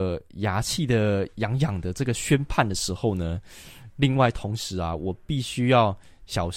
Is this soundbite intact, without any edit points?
yes; 0 cuts

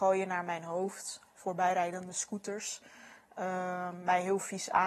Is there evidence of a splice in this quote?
no; 0 cuts

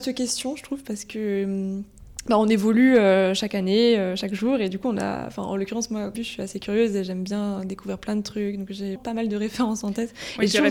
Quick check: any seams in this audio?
yes; 2 cuts; at 6.1 s, 9.0 s

